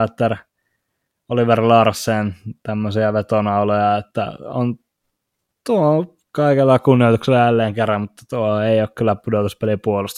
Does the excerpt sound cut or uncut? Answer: uncut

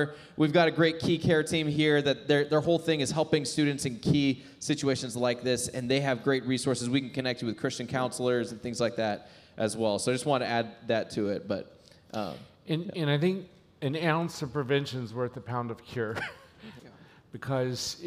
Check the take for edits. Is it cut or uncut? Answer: cut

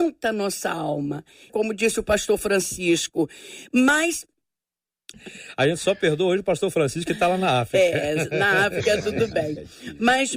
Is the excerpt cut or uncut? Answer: cut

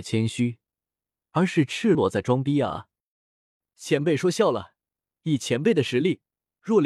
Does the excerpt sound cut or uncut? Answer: cut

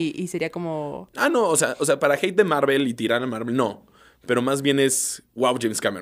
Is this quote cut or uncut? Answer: uncut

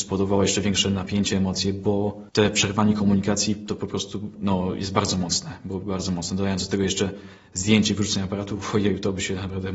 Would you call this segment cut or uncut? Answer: cut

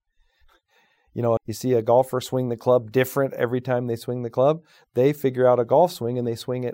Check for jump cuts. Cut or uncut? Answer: cut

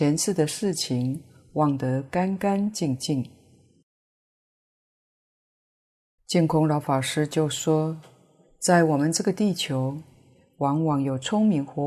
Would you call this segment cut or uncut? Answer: uncut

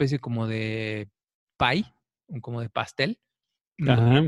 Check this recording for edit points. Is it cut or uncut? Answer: uncut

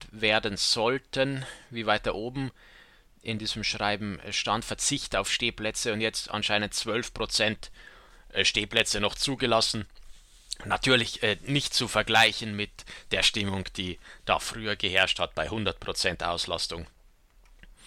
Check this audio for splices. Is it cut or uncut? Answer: uncut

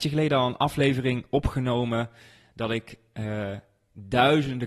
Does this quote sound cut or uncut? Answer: uncut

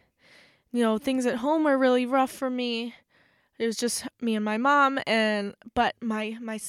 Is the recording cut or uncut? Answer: uncut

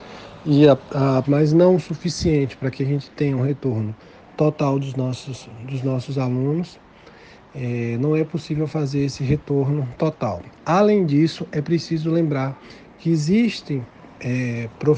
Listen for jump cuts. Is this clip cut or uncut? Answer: cut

